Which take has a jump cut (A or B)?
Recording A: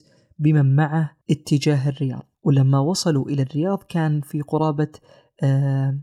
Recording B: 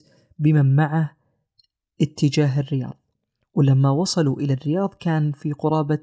A